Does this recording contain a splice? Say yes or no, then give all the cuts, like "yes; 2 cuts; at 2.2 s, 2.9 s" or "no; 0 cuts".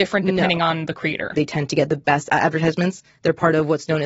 yes; 1 cut; at 1.3 s